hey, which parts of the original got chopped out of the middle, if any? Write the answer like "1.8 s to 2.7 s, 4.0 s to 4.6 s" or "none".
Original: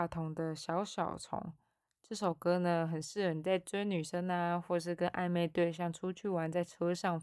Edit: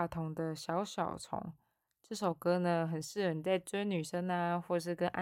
none